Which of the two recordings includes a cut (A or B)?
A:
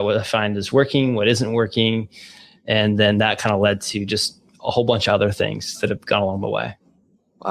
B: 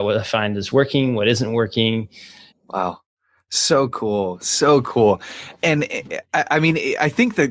B